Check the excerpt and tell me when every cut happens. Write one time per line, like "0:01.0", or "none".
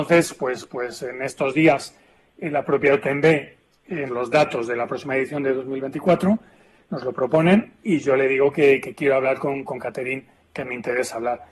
0:04.1

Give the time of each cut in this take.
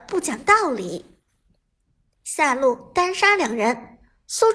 none

